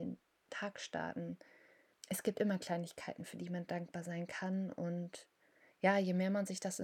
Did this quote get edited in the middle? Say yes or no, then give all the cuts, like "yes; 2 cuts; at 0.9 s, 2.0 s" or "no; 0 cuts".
yes; 1 cut; at 1.9 s